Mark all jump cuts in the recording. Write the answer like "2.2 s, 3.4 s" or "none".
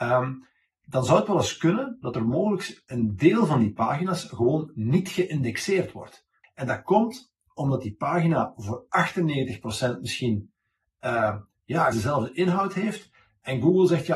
6.4 s, 11.9 s

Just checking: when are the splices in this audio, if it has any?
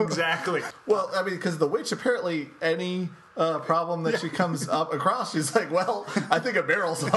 none

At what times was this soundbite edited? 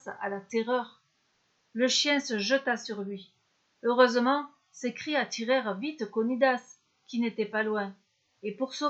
none

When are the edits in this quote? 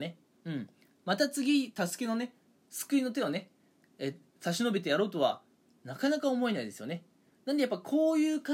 none

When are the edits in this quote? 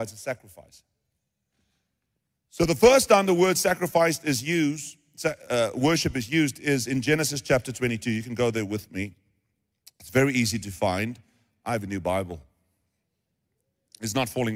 none

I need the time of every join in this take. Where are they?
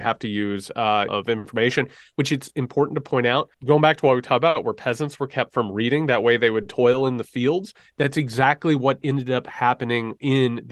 1.1 s, 3.5 s

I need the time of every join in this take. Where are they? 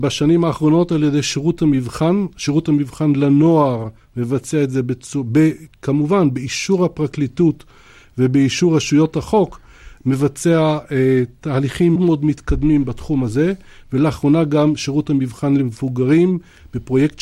12.0 s

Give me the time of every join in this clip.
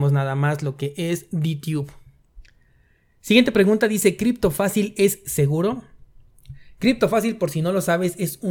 none

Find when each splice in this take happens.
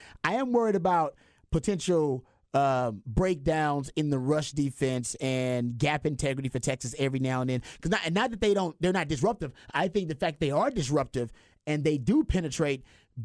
none

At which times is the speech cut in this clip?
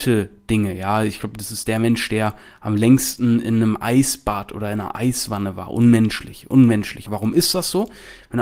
7.1 s

